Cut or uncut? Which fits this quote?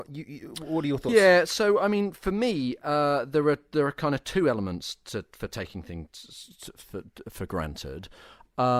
uncut